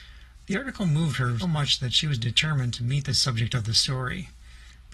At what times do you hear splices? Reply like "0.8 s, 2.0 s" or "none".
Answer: 1.4 s